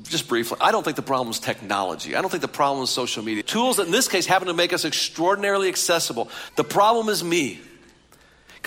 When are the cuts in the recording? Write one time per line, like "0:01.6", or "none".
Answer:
0:03.4
0:06.5